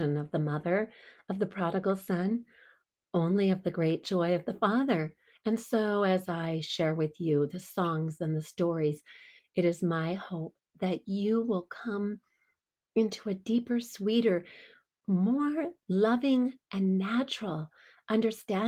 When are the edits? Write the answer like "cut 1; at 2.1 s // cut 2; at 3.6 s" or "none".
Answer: cut 1; at 5.3 s